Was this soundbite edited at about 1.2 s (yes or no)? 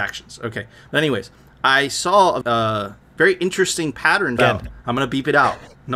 no